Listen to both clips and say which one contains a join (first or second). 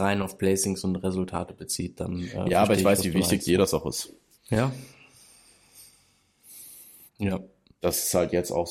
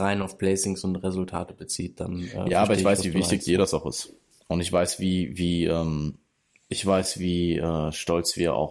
first